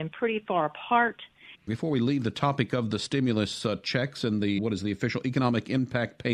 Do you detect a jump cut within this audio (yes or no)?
yes